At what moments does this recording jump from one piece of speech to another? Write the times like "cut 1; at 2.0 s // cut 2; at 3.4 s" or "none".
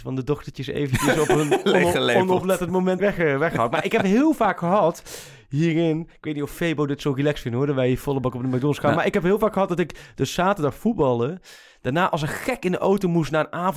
cut 1; at 3.0 s